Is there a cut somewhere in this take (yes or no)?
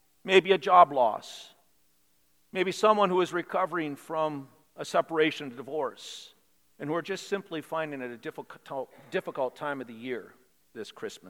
yes